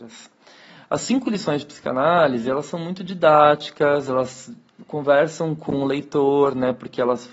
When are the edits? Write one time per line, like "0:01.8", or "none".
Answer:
none